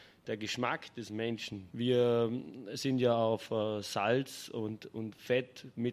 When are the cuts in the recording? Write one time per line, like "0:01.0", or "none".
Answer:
0:01.7

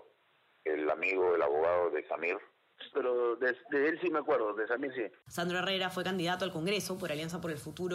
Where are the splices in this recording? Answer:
0:02.9
0:05.2

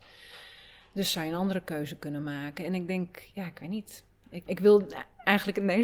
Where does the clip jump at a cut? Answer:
0:04.5

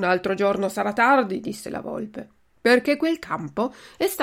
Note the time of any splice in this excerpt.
0:02.5

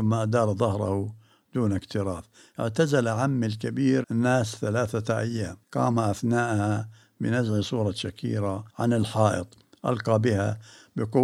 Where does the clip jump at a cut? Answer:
0:04.0
0:05.6
0:08.7

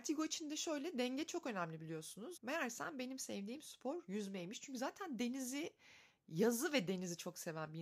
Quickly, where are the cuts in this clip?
0:02.4

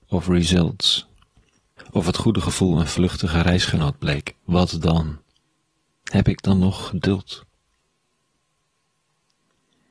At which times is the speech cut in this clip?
0:01.8

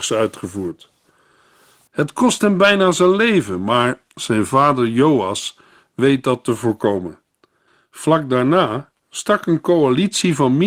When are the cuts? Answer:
0:01.9

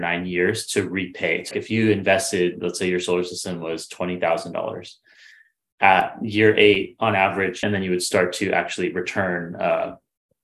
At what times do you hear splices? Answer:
0:01.5
0:07.6

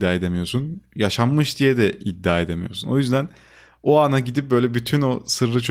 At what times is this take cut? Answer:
none

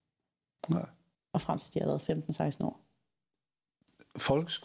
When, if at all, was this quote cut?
none

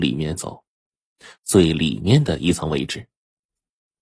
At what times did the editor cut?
0:01.3

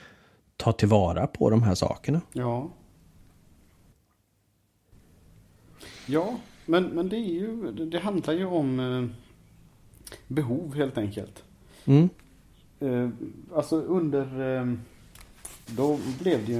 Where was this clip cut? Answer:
0:15.7

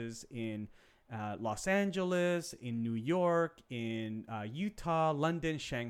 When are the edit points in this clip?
none

